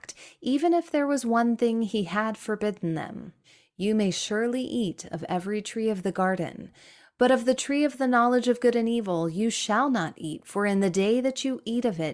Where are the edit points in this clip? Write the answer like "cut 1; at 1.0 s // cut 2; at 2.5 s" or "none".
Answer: none